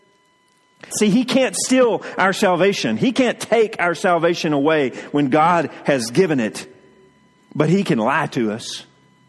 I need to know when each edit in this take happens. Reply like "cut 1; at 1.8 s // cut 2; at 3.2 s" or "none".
cut 1; at 0.9 s